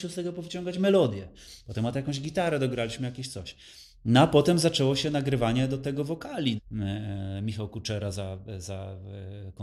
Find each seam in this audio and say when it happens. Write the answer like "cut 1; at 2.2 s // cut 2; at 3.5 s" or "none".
cut 1; at 6.6 s